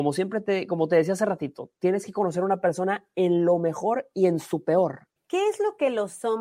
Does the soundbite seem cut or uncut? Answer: cut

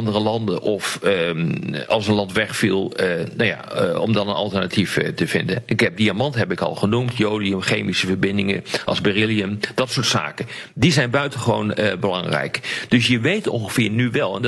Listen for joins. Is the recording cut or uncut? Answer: uncut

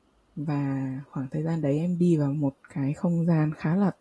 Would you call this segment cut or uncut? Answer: uncut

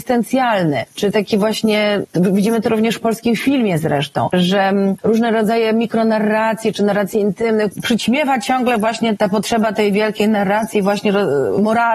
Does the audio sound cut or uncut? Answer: uncut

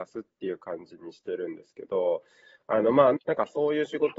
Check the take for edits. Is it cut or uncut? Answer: cut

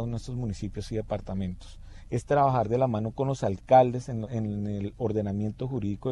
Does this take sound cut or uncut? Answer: cut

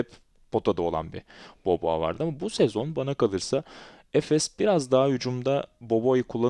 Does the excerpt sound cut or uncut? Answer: uncut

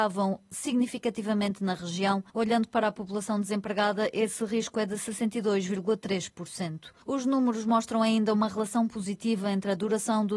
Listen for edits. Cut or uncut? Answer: cut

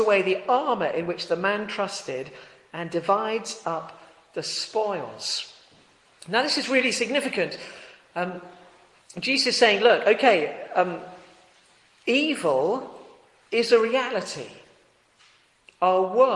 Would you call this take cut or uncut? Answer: uncut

